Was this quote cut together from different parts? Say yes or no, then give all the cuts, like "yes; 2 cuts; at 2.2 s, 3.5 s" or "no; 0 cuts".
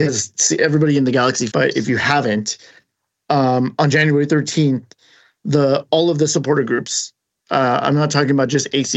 yes; 1 cut; at 1.5 s